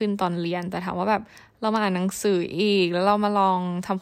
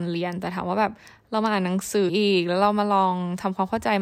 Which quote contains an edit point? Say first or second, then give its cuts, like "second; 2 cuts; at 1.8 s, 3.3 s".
second; 1 cut; at 2.1 s